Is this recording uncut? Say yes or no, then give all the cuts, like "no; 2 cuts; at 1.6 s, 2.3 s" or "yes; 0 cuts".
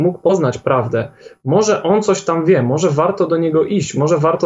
yes; 0 cuts